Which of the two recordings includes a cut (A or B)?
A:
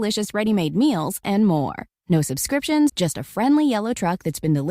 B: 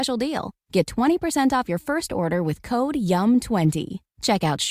A